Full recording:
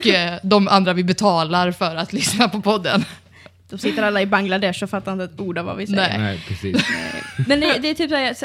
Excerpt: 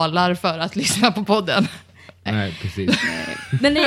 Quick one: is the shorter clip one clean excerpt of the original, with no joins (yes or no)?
no